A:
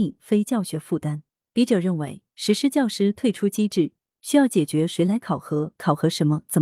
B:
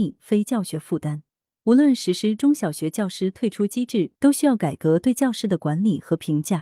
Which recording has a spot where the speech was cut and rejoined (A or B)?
B